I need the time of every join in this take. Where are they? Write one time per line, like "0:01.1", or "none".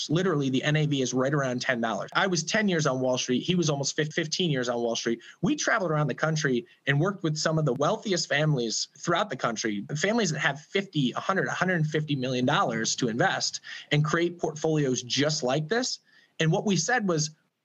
0:02.1